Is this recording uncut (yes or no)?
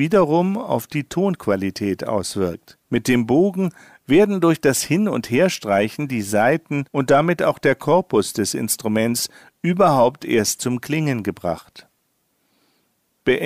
no